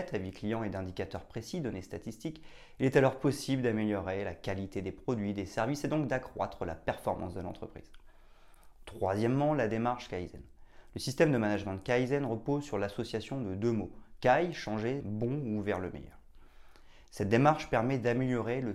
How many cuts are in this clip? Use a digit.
1